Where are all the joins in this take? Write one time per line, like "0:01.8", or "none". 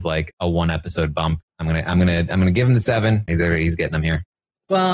0:01.5
0:03.3